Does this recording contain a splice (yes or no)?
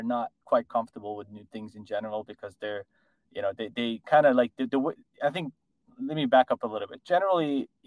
no